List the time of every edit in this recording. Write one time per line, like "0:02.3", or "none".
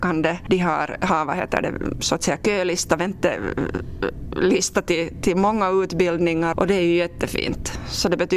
0:06.5